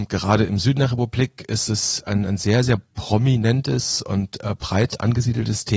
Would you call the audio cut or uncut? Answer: uncut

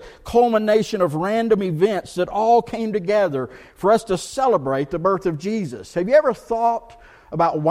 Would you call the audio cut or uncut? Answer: uncut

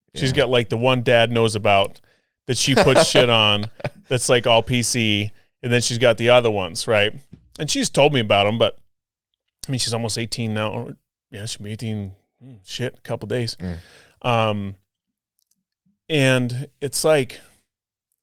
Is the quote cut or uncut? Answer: uncut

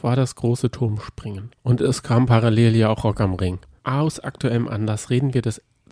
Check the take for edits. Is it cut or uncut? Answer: cut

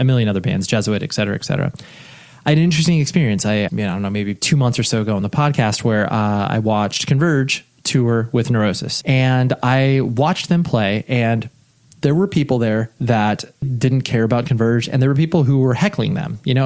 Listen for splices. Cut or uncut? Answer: cut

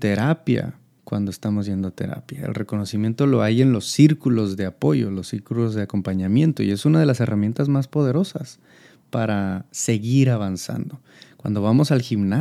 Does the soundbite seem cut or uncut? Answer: uncut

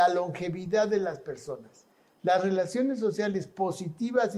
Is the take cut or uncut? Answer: uncut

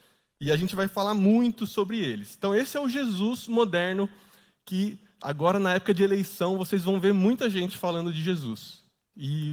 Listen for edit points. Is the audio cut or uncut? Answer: uncut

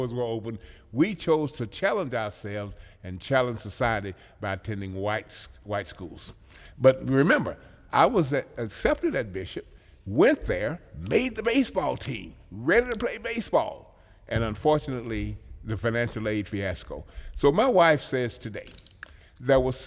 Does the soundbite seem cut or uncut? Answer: uncut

